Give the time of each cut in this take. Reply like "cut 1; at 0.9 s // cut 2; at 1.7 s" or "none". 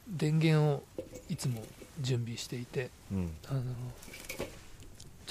none